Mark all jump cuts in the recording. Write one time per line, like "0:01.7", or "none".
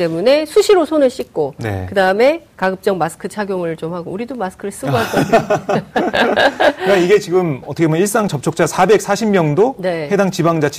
none